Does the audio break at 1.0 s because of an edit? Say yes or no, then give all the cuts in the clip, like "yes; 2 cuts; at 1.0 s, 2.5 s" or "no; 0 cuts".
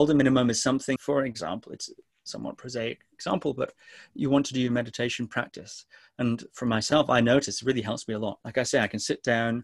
yes; 1 cut; at 1.0 s